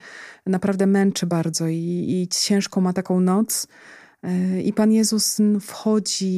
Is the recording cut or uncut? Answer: uncut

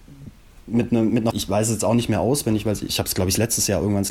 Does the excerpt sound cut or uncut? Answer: cut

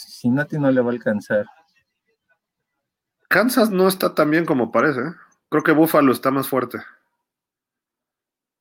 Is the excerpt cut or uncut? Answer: uncut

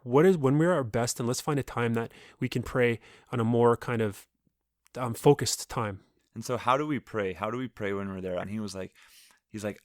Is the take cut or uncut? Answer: cut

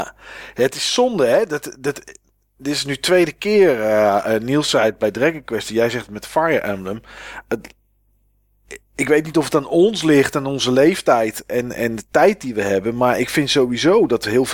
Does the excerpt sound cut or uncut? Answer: uncut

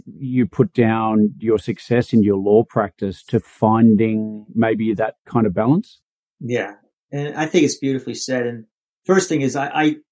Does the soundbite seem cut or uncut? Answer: uncut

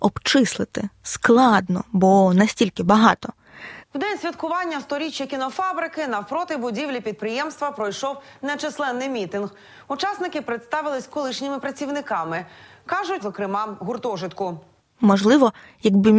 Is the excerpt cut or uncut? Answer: cut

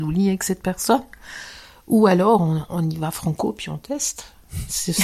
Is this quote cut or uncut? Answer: uncut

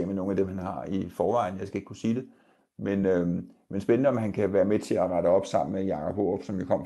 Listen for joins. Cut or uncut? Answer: uncut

